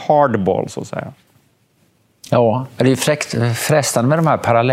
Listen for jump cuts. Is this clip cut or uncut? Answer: uncut